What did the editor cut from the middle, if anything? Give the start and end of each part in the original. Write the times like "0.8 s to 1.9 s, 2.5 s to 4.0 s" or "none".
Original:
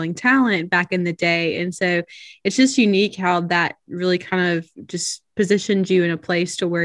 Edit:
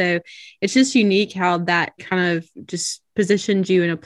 3.8 s to 4.2 s